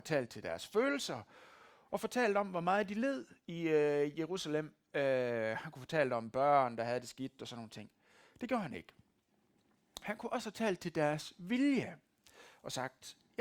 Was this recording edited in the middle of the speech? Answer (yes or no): no